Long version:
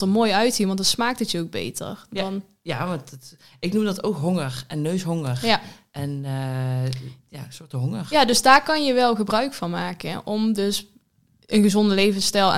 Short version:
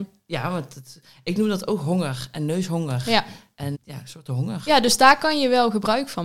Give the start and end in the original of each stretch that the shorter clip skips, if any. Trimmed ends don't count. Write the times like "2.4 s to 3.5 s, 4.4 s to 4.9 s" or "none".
6.1 s to 7.2 s